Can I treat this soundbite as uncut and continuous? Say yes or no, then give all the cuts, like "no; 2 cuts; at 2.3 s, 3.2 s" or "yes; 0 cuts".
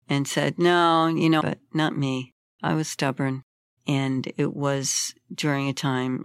no; 2 cuts; at 1.4 s, 3.8 s